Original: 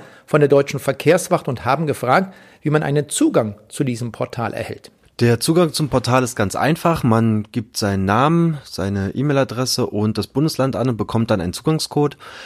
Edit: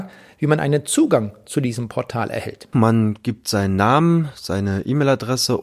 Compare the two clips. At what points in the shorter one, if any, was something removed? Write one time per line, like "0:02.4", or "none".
0:02.7